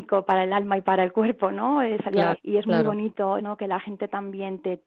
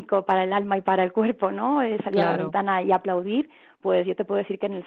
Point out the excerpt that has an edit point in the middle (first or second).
first